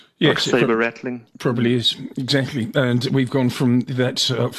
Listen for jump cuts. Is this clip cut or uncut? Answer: uncut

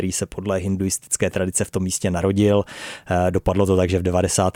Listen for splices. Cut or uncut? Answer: uncut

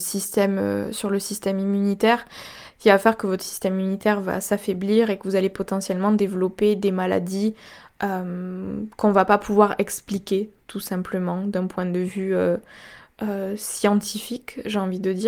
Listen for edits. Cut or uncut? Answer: uncut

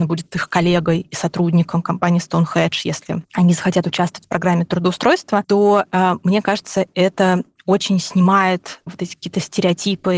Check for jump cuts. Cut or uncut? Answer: uncut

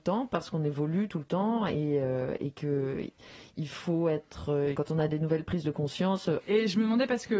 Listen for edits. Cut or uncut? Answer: cut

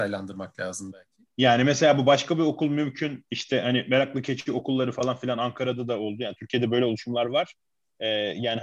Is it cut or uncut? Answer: uncut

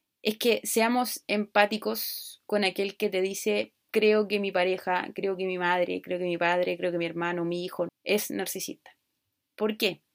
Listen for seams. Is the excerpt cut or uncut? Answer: cut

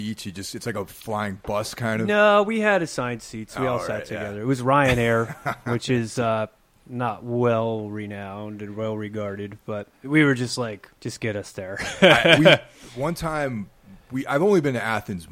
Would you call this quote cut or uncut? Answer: cut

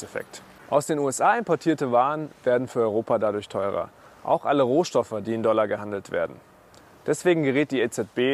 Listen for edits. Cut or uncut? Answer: uncut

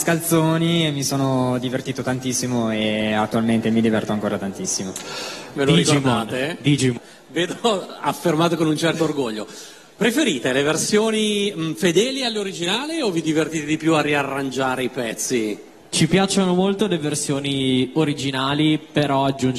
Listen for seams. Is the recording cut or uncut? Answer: cut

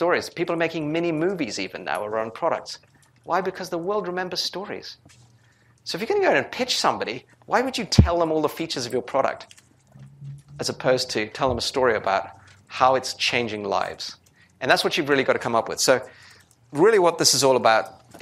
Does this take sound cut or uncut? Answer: uncut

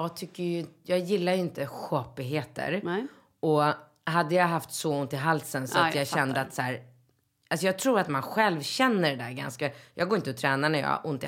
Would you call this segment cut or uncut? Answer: uncut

